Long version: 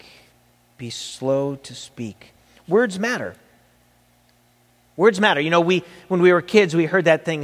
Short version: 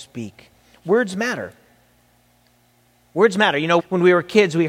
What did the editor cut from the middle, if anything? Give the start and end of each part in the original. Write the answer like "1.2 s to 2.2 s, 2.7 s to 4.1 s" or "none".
5.6 s to 6.0 s